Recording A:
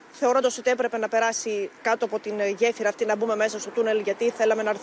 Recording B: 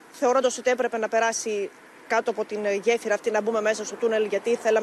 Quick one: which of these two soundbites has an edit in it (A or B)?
A